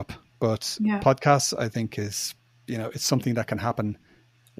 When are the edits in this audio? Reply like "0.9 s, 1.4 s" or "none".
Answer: none